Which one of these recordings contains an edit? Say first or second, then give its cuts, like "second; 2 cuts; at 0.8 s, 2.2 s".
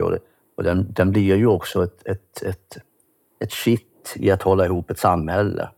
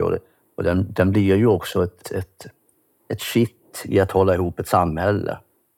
second; 1 cut; at 2.0 s